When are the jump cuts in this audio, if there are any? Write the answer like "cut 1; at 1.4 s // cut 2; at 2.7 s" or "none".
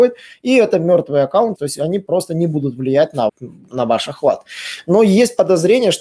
cut 1; at 1.6 s // cut 2; at 3.3 s